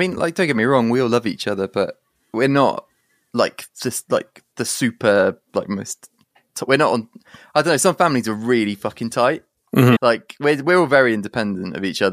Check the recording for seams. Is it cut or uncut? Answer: cut